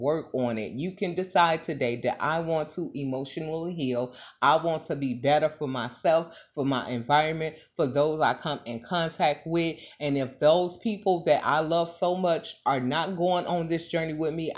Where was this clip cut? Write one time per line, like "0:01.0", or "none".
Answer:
none